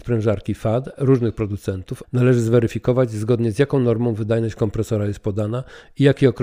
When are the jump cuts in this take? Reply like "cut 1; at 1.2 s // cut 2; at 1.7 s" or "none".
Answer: cut 1; at 2.0 s